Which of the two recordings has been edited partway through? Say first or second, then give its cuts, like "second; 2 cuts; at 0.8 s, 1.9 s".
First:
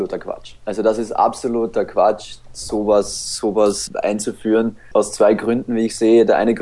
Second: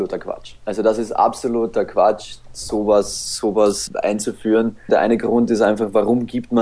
second; 1 cut; at 4.9 s